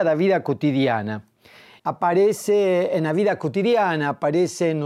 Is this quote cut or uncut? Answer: cut